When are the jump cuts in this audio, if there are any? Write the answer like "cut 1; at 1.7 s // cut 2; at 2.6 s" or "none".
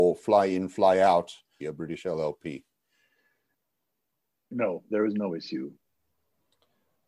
cut 1; at 1.6 s